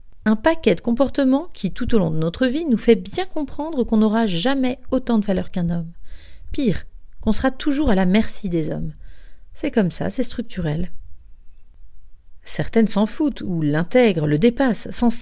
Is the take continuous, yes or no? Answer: yes